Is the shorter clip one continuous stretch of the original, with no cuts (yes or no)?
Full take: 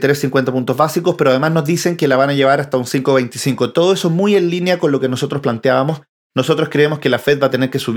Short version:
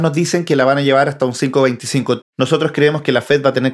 no